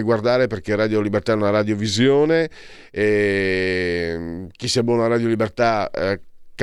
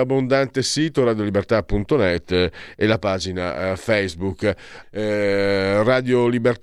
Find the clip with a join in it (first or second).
second